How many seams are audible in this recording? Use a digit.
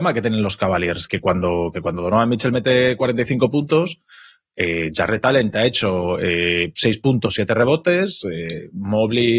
1